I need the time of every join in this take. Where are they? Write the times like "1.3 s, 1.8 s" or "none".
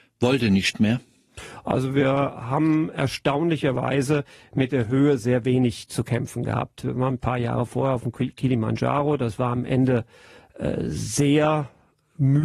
none

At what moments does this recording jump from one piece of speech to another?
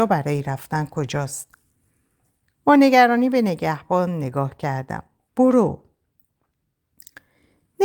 5.3 s

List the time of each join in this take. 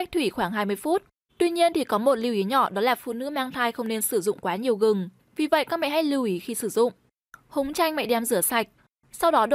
1.3 s, 7.3 s

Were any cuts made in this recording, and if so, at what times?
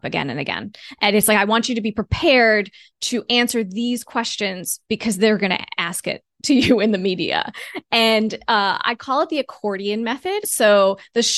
10.4 s

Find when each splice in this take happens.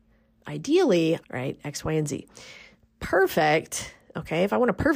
1.2 s

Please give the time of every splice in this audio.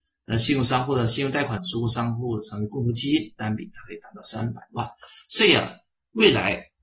1.6 s

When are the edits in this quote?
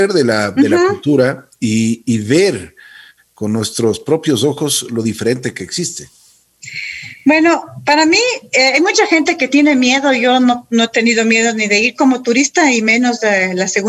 none

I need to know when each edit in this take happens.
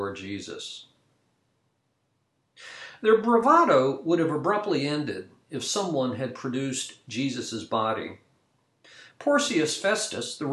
9.1 s

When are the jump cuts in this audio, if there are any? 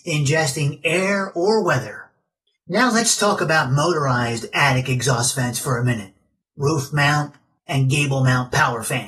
none

